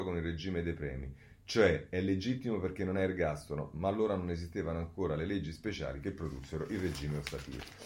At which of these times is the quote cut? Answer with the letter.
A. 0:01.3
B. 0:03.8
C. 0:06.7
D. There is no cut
D